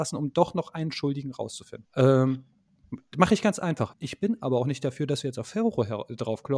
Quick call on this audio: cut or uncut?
cut